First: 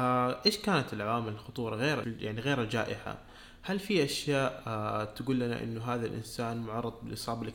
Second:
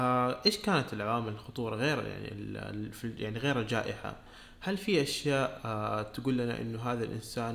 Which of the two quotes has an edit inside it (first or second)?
first